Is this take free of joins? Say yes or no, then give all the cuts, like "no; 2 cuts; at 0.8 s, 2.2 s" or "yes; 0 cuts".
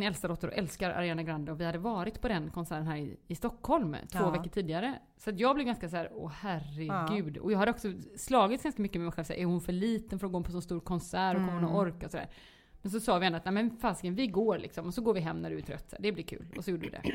yes; 0 cuts